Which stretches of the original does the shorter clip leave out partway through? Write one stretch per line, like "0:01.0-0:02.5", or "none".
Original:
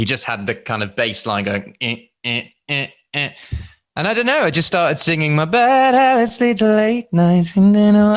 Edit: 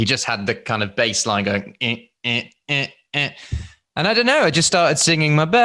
none